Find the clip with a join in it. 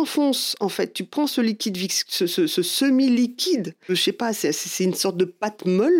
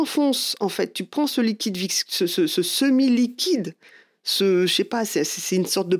first; 1 cut; at 3.9 s

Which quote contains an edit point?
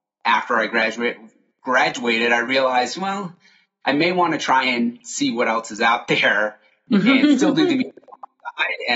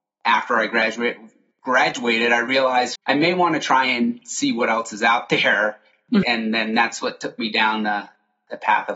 second; 2 cuts; at 3.0 s, 6.2 s

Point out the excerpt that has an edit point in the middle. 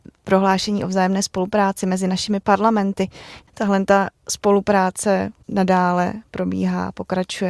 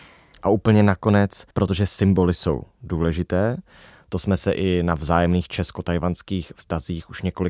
second; 1 cut; at 1.5 s

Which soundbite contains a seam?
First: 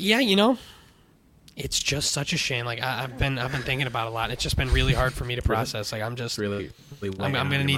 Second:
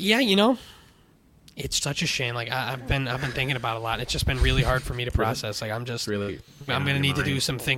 second; 2 cuts; at 1.8 s, 6.7 s

